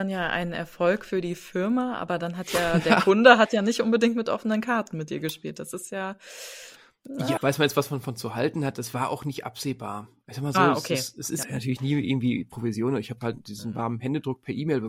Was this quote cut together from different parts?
yes; 2 cuts; at 7.4 s, 11.4 s

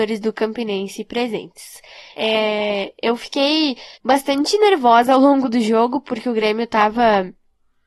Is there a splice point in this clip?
yes; 2 cuts; at 2.2 s, 3.9 s

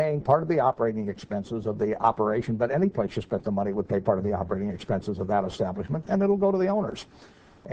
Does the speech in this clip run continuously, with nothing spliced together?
yes; 0 cuts

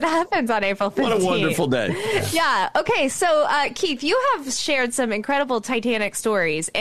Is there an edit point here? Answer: no; 0 cuts

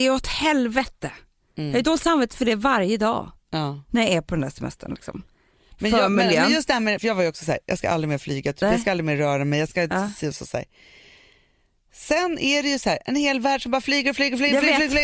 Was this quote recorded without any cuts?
no; 1 cut; at 7.0 s

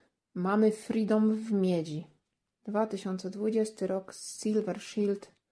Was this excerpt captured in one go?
no; 1 cut; at 2.5 s

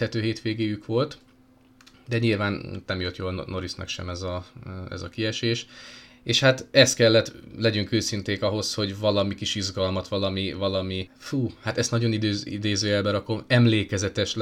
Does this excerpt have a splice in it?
yes; 1 cut; at 11.1 s

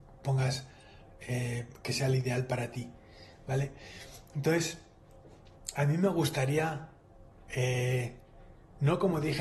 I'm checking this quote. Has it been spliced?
no; 0 cuts

